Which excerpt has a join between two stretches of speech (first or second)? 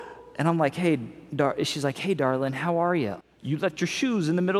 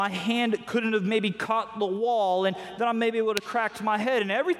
first